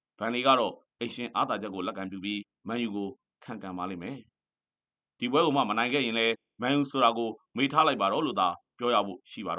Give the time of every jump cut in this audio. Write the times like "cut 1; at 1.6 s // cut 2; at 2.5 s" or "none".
none